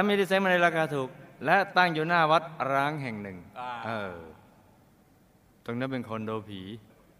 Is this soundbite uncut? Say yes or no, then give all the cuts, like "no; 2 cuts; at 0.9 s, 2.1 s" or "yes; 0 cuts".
yes; 0 cuts